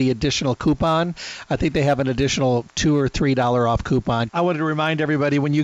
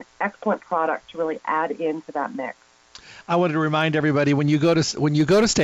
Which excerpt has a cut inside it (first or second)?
first